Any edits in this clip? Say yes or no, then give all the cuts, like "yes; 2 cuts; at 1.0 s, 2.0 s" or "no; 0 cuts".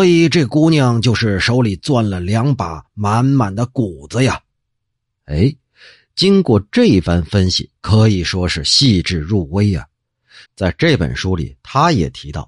yes; 1 cut; at 10.4 s